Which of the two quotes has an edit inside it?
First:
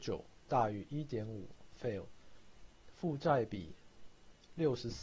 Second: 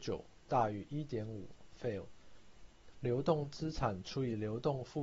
second; 1 cut; at 2.9 s

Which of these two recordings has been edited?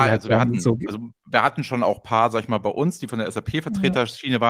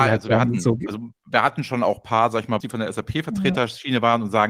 second; 1 cut; at 2.6 s

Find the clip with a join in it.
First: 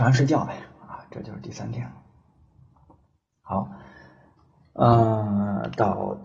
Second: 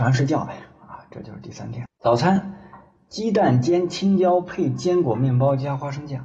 second; 1 cut; at 1.9 s

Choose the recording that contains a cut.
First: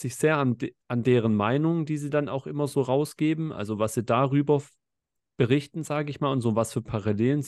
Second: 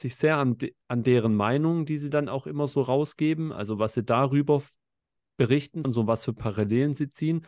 second; 1 cut; at 5.8 s

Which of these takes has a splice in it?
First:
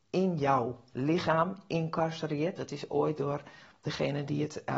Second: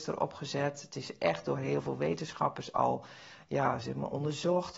first; 1 cut; at 2.6 s

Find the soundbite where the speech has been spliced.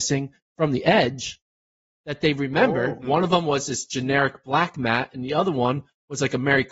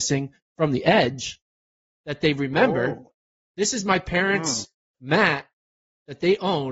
first; 1 cut; at 3.0 s

